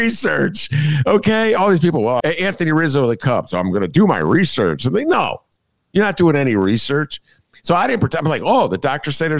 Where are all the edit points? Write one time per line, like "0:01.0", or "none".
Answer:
0:02.2